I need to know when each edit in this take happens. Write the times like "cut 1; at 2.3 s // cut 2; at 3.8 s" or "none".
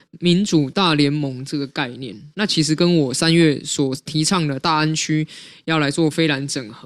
none